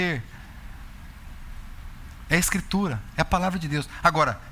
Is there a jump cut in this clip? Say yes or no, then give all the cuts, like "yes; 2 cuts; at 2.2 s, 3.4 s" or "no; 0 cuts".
no; 0 cuts